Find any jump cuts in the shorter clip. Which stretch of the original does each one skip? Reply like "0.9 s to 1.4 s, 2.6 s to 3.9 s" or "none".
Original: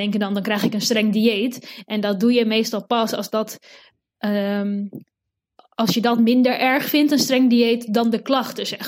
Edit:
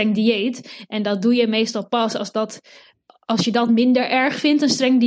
4.0 s to 5.6 s

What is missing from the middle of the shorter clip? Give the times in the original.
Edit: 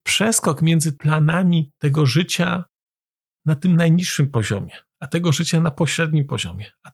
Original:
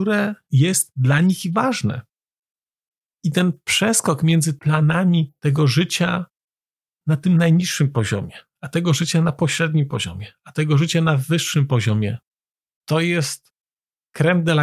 none

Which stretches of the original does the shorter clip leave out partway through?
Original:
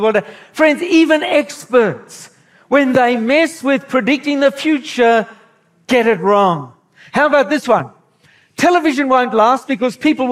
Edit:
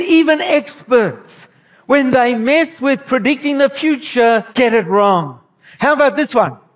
5.3 s to 5.8 s

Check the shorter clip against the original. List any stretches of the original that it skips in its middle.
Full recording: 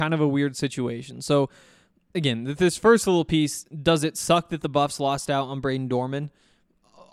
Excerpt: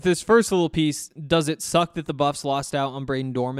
none

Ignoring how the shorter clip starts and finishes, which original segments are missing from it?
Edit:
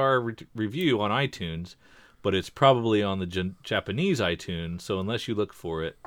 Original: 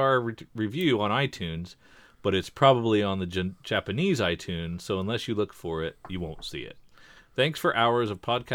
none

